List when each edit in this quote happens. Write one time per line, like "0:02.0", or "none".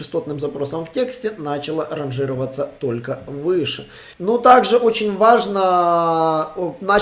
0:04.1